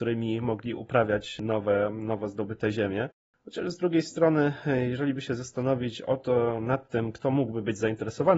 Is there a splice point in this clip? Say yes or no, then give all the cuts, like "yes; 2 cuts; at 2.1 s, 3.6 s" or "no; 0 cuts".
no; 0 cuts